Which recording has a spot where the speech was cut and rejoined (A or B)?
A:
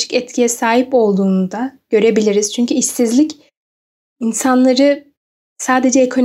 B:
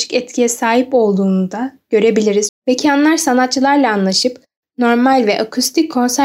B